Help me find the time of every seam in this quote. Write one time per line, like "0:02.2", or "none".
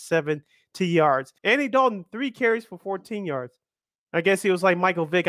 0:01.4